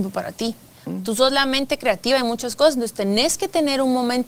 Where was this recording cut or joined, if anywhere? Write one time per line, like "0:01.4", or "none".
none